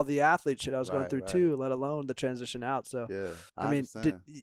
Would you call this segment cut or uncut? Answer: cut